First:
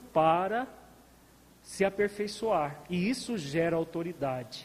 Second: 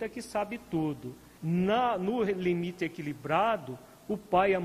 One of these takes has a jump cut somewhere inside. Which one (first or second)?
second